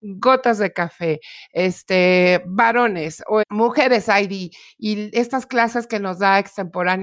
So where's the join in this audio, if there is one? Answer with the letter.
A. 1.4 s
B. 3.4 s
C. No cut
B